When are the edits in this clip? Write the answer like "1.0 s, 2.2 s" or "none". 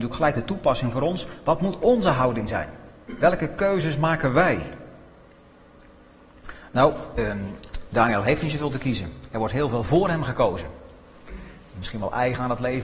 none